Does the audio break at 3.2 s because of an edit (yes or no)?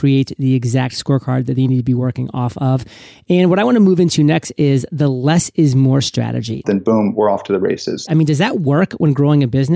no